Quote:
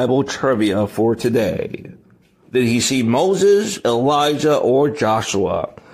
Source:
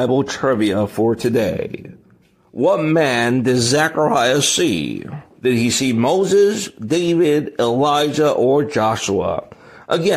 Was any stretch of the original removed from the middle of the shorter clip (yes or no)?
yes